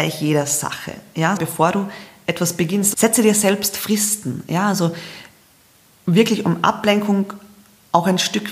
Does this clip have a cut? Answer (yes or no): yes